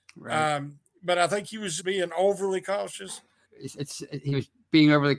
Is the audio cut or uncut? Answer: cut